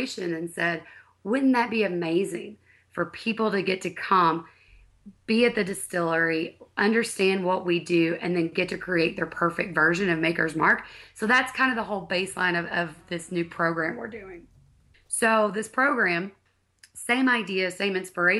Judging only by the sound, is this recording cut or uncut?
cut